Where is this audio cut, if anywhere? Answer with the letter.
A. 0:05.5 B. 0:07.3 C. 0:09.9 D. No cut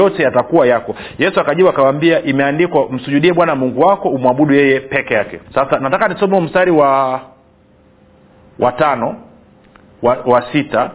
A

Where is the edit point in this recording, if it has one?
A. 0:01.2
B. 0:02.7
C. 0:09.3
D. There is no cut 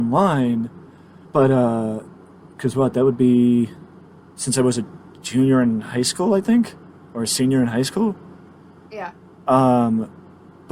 A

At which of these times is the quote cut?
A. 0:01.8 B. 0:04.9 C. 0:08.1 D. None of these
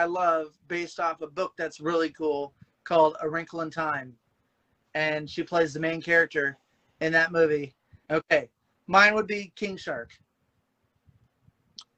C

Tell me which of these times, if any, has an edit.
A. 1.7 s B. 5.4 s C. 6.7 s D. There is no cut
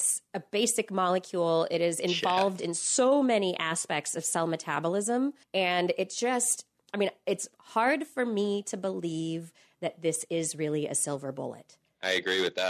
B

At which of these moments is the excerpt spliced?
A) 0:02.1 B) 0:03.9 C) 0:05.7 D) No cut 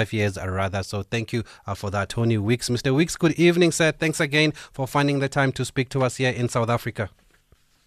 A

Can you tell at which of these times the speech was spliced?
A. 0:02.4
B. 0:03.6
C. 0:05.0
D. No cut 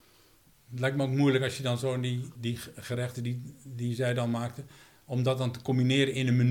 A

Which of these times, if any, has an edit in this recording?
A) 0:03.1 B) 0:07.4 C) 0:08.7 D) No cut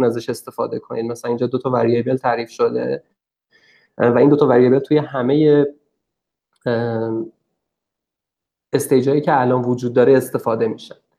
D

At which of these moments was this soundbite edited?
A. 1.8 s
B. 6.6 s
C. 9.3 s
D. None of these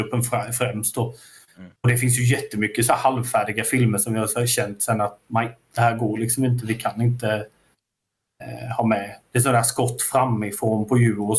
A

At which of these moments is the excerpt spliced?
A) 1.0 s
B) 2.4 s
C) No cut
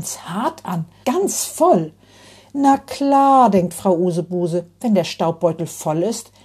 A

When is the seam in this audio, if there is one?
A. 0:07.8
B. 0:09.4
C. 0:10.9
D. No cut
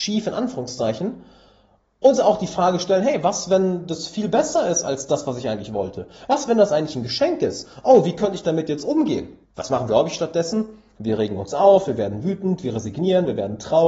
B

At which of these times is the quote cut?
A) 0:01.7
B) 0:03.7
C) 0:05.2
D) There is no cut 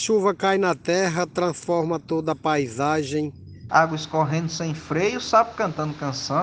B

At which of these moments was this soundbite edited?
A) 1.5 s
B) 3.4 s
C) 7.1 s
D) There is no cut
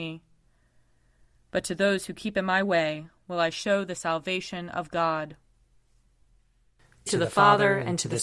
C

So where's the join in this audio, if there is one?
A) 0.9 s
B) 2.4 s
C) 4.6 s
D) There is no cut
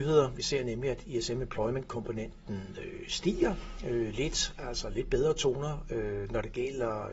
D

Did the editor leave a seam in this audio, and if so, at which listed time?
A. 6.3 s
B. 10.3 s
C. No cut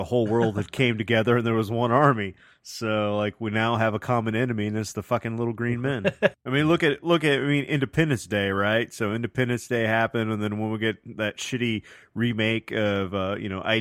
A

